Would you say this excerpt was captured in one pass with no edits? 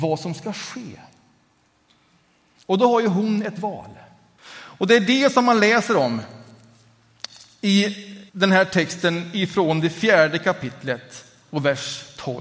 no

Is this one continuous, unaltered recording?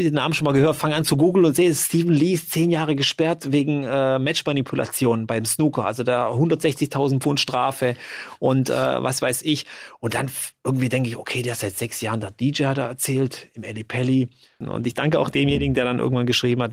no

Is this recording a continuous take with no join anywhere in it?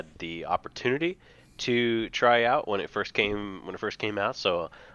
yes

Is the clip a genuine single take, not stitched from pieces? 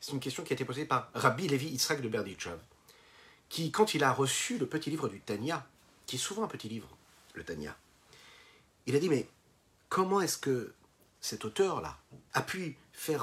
no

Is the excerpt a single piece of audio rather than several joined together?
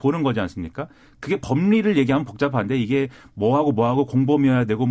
yes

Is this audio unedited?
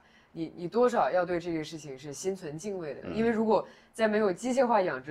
no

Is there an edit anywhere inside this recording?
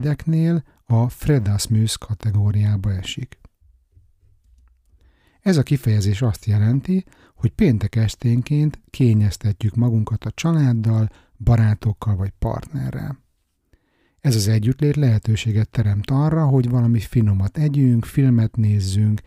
no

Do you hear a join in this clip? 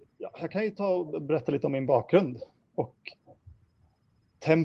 yes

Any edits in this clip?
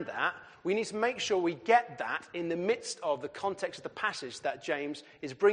no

